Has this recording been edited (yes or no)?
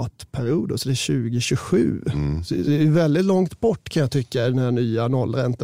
no